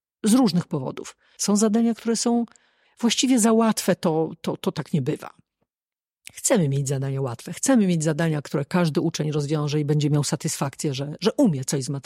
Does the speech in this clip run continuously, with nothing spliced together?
no; 1 cut; at 1.4 s

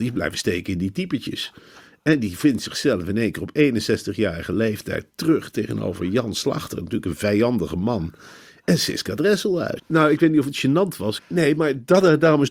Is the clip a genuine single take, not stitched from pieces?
no; 2 cuts; at 9.8 s, 11.2 s

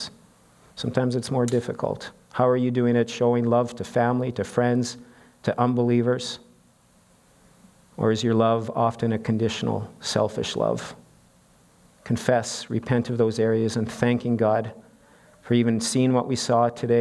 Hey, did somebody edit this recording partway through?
no; 0 cuts

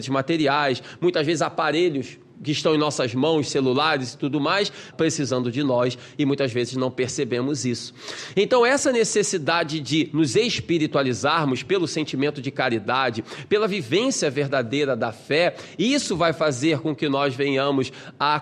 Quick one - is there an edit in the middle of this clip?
yes; 1 cut; at 4.9 s

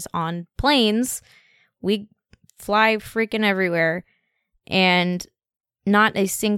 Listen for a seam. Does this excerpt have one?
no; 0 cuts

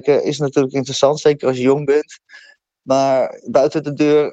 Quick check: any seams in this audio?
no; 0 cuts

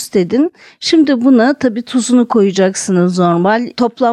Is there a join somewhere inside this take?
no; 0 cuts

